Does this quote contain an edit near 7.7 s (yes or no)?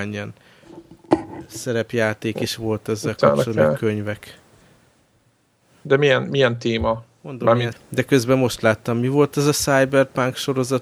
yes